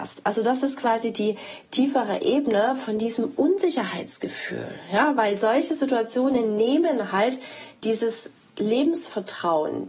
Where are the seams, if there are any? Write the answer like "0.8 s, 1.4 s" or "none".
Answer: none